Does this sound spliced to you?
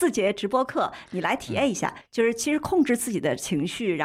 no; 0 cuts

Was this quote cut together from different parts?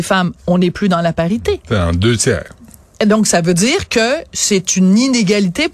no; 0 cuts

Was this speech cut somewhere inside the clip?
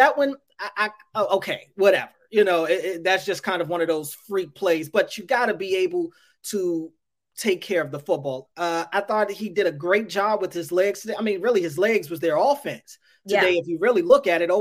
yes; 1 cut; at 8.5 s

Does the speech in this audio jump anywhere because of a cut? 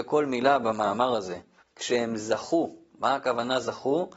yes; 1 cut; at 1.6 s

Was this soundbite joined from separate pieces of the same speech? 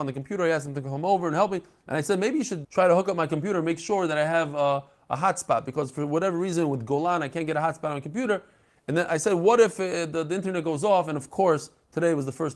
yes; 1 cut; at 2.6 s

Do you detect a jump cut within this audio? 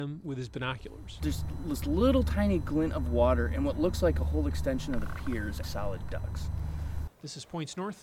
yes; 2 cuts; at 5.6 s, 7.1 s

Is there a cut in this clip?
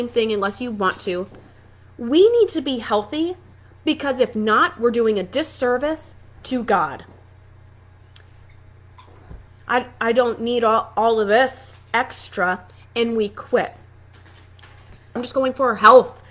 yes; 2 cuts; at 9.5 s, 15.2 s

